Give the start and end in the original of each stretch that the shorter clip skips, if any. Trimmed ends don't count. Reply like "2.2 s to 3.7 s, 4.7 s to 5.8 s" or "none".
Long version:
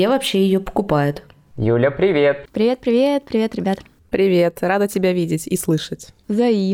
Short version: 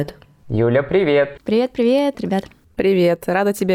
3.2 s to 3.5 s